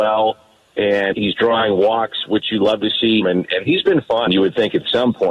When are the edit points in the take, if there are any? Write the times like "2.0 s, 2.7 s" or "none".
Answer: 1.1 s, 3.2 s, 4.3 s